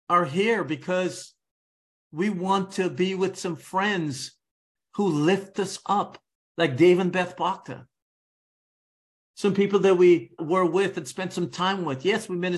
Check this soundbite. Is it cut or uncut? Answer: cut